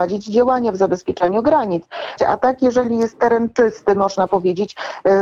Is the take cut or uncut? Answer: cut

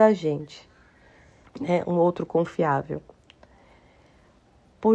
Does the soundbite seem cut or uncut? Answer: cut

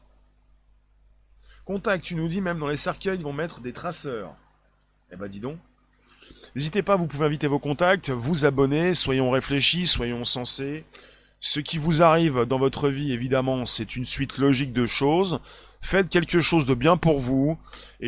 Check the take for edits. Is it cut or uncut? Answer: uncut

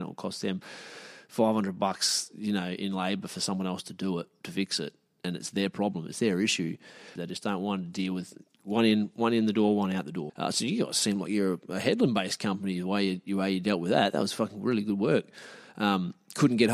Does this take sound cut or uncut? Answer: cut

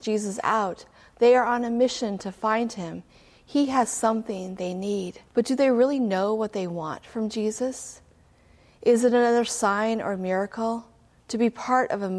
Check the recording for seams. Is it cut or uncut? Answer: cut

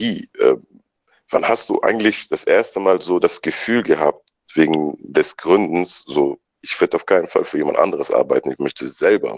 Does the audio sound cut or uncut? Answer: uncut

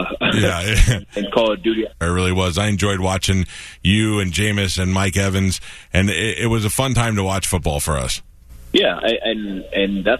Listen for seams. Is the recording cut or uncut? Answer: cut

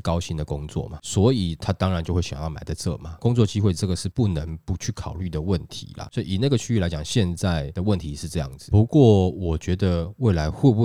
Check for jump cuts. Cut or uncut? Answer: uncut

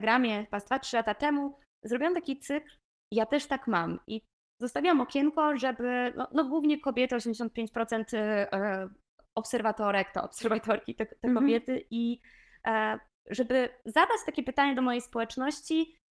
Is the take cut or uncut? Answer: uncut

